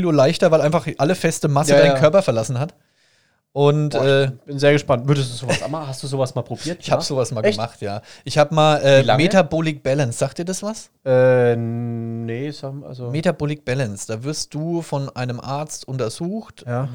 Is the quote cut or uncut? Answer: uncut